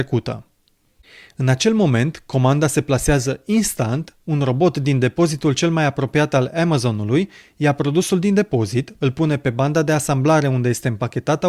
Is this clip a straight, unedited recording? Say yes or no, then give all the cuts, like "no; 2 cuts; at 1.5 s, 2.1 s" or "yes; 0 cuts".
yes; 0 cuts